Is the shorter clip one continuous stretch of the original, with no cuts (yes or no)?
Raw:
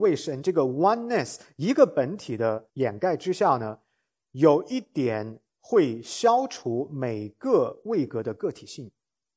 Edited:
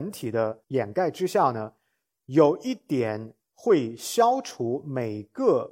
yes